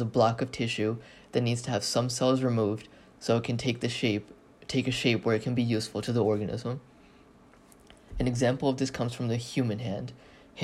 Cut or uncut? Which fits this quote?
uncut